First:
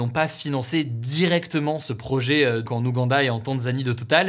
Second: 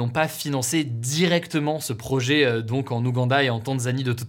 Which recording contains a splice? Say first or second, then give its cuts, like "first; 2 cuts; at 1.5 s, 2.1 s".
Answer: first; 1 cut; at 2.6 s